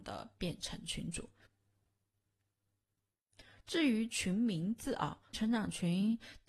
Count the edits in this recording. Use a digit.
1